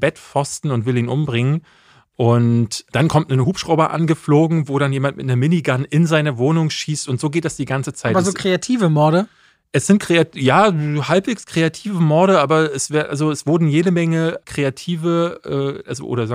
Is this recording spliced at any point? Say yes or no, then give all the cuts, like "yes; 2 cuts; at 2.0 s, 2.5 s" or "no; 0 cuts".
no; 0 cuts